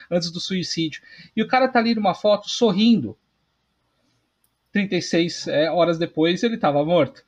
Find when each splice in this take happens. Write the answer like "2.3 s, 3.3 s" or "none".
none